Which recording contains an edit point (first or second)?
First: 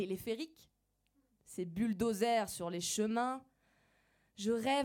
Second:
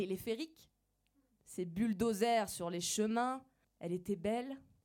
second